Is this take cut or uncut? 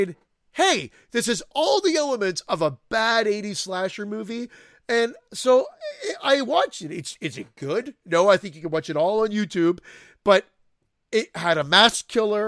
uncut